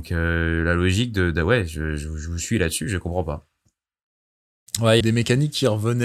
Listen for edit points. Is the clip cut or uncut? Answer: cut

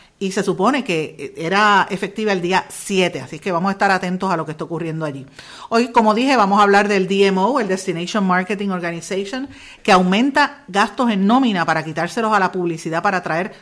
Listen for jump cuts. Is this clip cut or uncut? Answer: uncut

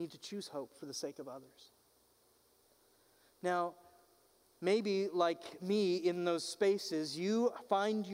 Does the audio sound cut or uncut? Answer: uncut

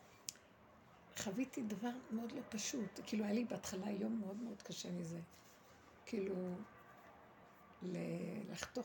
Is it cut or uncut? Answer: uncut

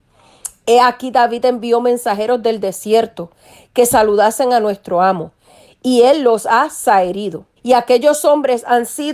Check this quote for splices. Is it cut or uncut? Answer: cut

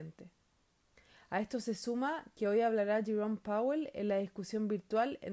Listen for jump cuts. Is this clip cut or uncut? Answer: uncut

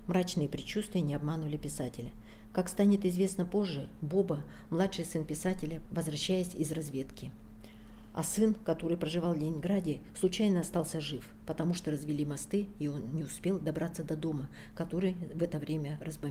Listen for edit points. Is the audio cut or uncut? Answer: cut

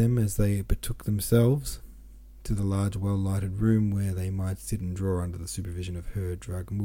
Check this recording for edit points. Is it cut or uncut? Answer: uncut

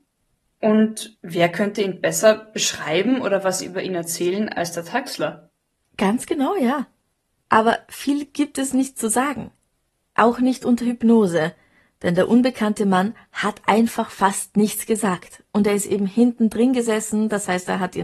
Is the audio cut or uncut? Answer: uncut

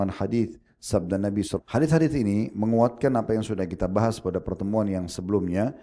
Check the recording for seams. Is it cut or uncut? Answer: cut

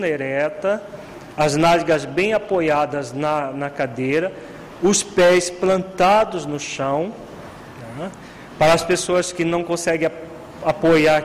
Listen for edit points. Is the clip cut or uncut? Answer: uncut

